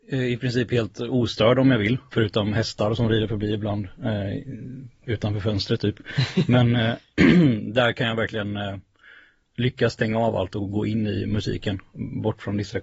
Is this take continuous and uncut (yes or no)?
no